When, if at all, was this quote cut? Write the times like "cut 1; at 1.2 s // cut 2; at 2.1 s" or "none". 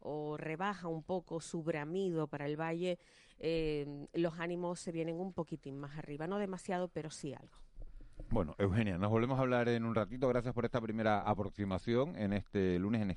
none